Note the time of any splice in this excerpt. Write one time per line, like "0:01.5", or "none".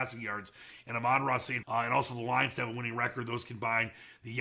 0:01.6